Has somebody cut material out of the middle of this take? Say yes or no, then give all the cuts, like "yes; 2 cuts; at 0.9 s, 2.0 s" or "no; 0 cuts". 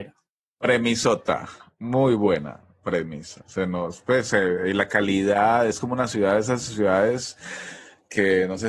no; 0 cuts